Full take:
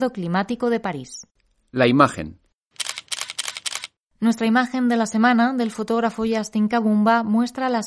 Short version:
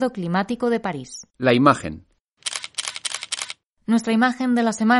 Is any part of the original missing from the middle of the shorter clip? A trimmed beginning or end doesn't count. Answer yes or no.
yes